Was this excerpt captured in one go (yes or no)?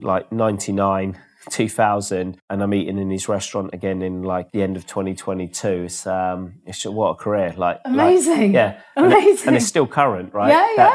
yes